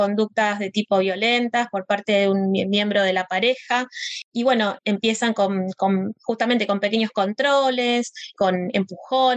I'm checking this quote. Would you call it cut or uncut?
uncut